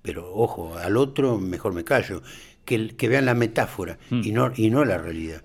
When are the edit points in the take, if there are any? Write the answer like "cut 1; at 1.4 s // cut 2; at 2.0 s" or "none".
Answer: none